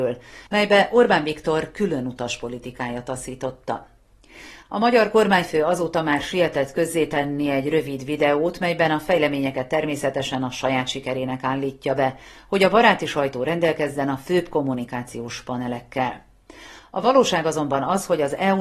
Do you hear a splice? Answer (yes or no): no